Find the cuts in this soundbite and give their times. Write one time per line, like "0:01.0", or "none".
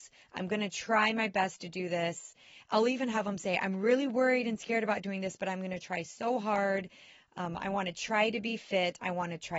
none